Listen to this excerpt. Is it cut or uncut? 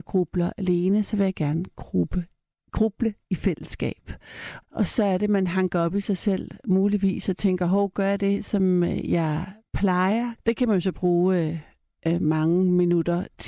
cut